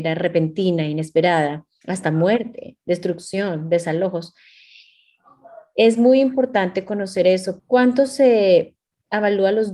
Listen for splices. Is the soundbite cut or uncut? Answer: cut